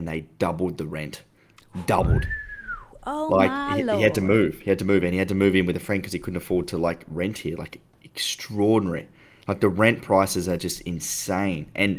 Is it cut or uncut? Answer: uncut